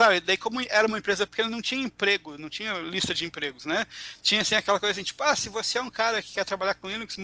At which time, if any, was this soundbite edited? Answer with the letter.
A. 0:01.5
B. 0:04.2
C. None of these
C